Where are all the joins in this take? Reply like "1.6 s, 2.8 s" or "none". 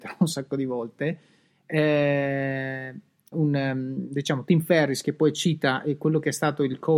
3.3 s